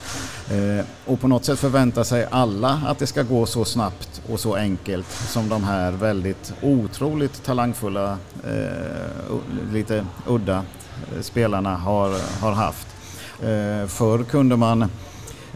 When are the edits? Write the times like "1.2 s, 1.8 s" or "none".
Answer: 13.4 s